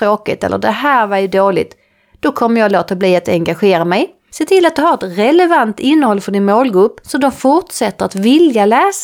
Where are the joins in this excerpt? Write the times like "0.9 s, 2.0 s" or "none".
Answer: 4.3 s